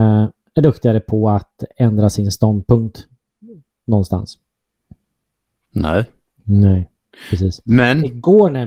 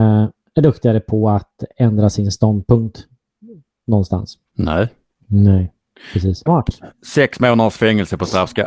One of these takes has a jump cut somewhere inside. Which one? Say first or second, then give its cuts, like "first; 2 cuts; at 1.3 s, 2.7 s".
second; 2 cuts; at 4.5 s, 6.5 s